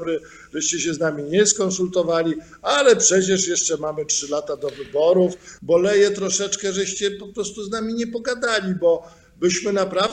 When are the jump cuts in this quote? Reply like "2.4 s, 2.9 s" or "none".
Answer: 5.6 s